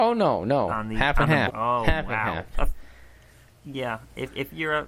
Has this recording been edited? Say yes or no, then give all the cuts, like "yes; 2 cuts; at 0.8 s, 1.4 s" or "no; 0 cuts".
yes; 2 cuts; at 1.5 s, 2.5 s